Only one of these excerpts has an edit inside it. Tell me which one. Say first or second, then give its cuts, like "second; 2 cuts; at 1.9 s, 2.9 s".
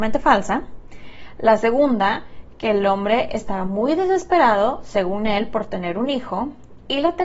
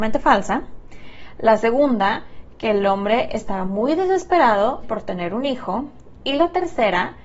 second; 1 cut; at 4.8 s